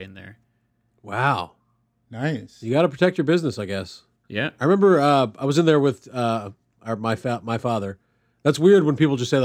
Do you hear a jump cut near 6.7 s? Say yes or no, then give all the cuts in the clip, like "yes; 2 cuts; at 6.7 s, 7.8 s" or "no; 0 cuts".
yes; 1 cut; at 6.7 s